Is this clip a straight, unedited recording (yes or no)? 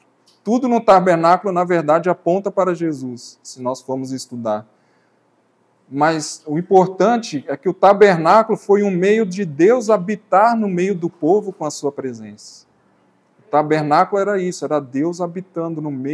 yes